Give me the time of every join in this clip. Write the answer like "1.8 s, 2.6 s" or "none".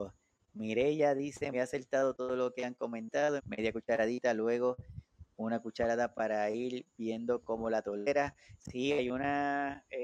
1.5 s, 3.4 s

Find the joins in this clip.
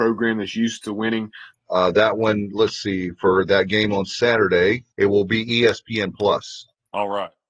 1.5 s, 4.9 s

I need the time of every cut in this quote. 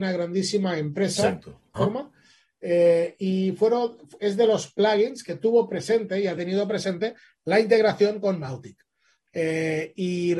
1.8 s

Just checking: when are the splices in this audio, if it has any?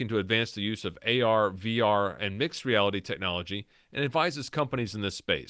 none

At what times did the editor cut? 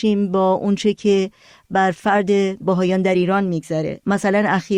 1.9 s

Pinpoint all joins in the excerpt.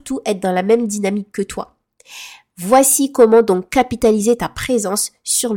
none

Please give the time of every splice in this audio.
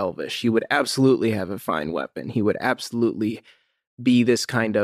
none

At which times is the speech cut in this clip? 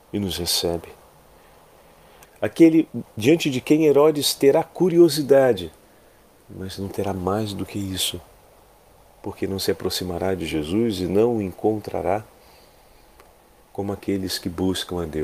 2.3 s

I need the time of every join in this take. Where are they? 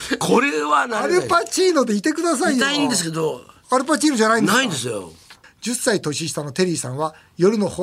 5.4 s

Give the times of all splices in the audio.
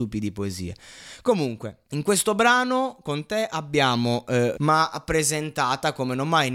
1.8 s, 4.5 s

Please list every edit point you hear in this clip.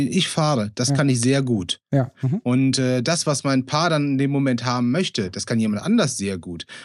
2.1 s

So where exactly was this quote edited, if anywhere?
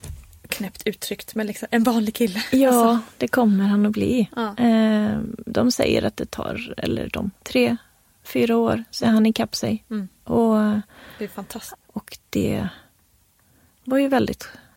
7.4 s, 11.7 s

